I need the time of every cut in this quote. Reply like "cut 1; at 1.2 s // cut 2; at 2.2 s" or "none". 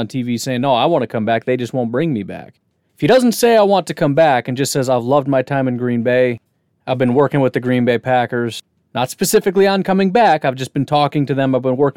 cut 1; at 2.9 s

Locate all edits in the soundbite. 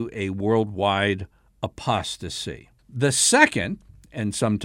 cut 1; at 2.8 s

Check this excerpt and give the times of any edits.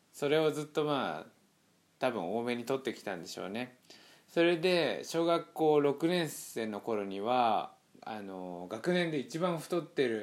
none

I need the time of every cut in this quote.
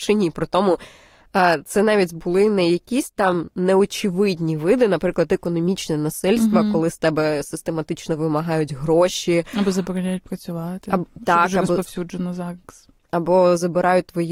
none

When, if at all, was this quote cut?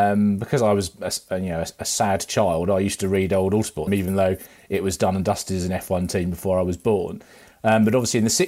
cut 1; at 3.9 s

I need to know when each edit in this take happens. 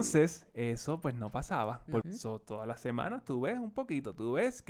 cut 1; at 2.0 s

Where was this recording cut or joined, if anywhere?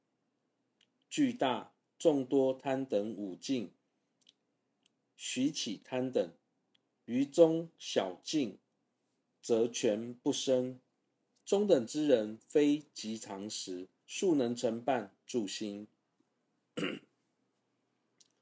cut 1; at 11.4 s // cut 2; at 14.0 s

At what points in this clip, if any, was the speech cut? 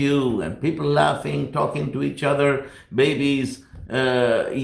none

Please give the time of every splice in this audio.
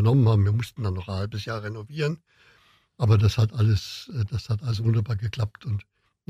none

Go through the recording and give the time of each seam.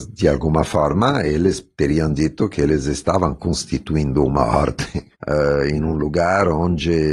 cut 1; at 5.1 s

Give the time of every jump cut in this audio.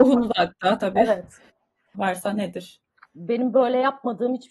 cut 1; at 1.9 s

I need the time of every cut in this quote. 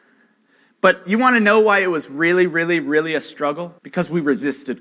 cut 1; at 3.8 s

